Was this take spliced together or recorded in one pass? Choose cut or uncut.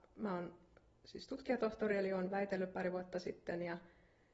uncut